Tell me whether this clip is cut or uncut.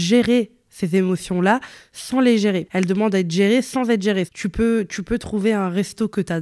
cut